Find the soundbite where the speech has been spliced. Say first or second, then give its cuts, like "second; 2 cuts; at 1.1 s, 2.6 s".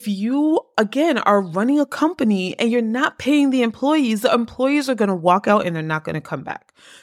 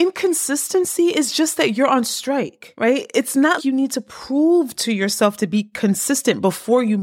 second; 1 cut; at 3.6 s